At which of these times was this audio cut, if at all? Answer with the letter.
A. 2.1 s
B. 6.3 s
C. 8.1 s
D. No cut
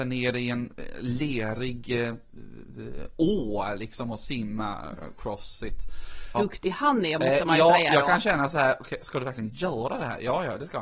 B